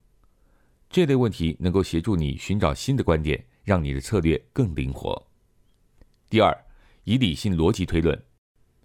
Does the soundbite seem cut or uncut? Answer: uncut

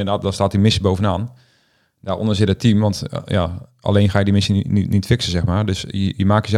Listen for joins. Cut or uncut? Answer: uncut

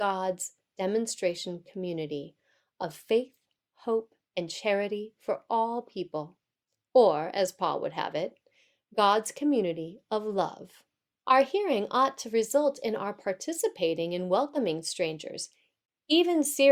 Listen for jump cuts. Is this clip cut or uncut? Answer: cut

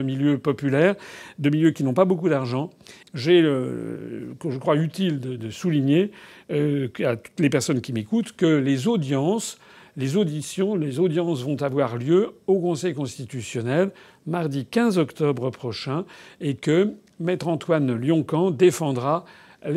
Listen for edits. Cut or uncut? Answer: cut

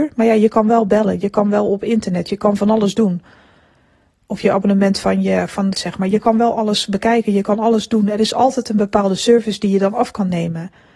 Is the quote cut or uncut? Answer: cut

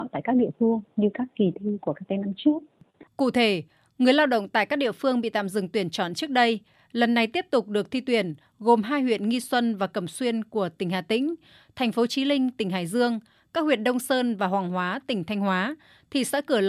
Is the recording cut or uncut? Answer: cut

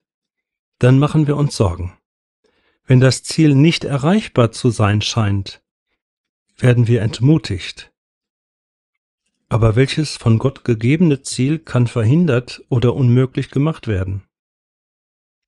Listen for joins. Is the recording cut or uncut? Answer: uncut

